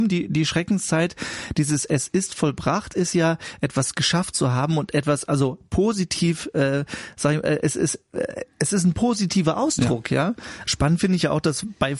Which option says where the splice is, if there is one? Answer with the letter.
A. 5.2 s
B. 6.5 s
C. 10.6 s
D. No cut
C